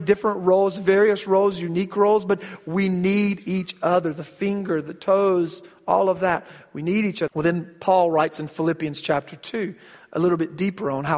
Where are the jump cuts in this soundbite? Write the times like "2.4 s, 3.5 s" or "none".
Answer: 7.3 s